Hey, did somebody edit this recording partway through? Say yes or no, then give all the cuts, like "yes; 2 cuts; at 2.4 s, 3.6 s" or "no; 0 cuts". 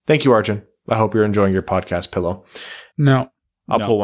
yes; 1 cut; at 2.9 s